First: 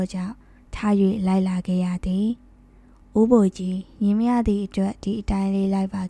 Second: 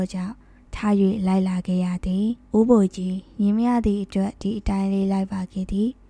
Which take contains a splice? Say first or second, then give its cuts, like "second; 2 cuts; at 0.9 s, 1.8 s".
second; 1 cut; at 2.4 s